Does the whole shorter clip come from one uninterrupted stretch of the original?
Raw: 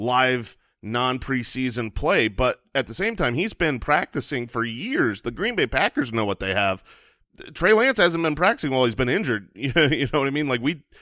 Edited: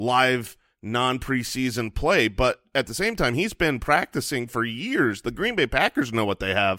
yes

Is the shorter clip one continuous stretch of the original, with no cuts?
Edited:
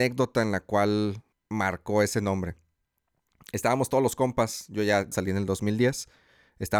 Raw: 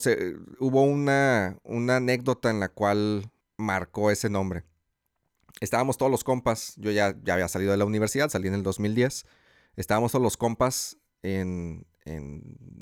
no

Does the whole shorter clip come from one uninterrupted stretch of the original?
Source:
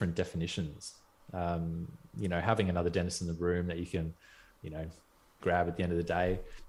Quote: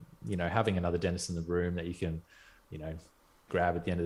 yes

